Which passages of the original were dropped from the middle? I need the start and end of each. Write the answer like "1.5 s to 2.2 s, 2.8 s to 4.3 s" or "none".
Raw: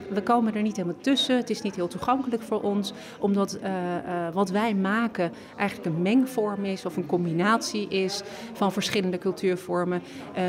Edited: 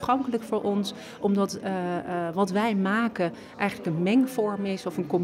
none